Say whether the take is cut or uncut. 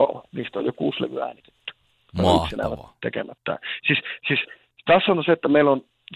uncut